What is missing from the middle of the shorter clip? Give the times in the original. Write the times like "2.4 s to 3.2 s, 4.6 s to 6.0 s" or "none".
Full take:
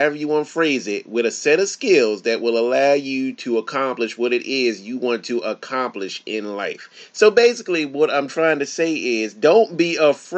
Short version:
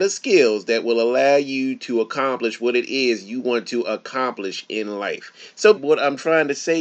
7.3 s to 7.9 s